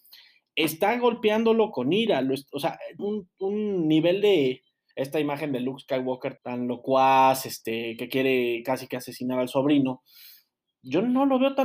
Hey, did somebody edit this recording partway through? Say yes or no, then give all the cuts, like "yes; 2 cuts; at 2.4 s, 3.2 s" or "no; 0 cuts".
yes; 3 cuts; at 3.0 s, 4.9 s, 6.4 s